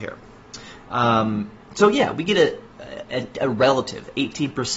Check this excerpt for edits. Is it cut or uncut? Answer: cut